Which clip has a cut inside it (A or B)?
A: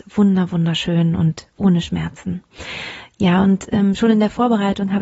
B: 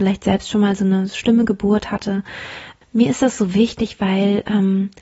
B